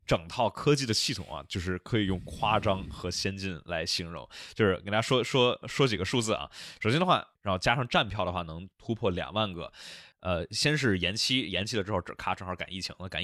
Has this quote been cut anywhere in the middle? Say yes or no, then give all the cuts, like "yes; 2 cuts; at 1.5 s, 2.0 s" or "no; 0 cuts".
yes; 2 cuts; at 7.4 s, 10.1 s